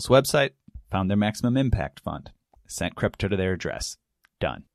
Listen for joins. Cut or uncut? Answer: cut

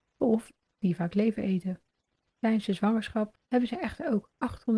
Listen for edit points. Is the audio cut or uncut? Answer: cut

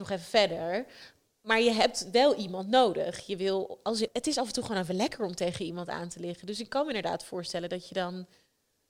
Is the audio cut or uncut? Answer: cut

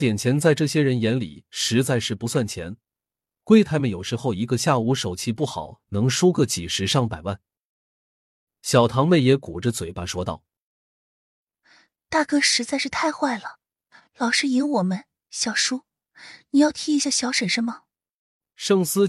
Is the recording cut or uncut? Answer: cut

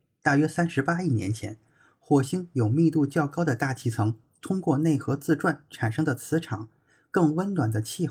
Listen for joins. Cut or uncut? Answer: uncut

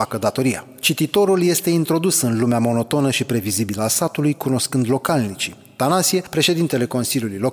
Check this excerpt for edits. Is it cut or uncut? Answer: uncut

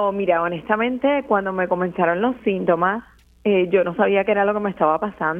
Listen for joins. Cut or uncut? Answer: uncut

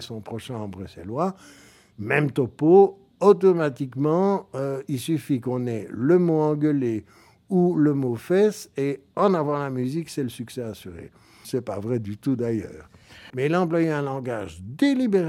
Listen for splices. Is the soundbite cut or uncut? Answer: cut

